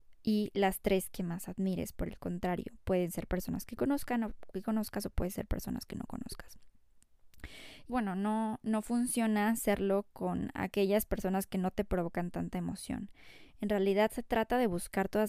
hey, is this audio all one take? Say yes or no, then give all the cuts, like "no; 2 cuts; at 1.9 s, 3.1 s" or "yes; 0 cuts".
no; 1 cut; at 7.9 s